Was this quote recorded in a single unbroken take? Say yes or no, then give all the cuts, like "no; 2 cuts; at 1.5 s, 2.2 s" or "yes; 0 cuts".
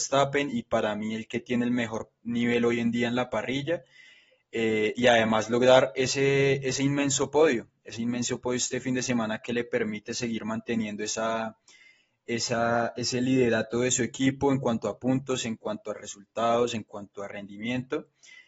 yes; 0 cuts